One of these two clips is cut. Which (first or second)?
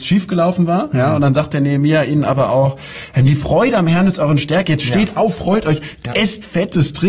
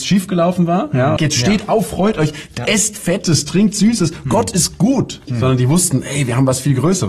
second